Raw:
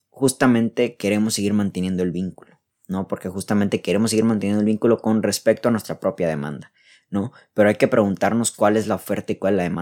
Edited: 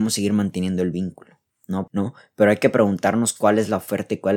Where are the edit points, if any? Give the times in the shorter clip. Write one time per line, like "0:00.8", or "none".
0:01.9